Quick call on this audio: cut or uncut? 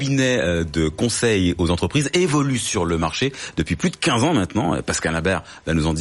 uncut